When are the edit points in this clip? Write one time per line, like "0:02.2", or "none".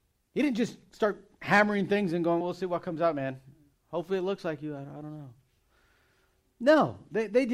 0:02.4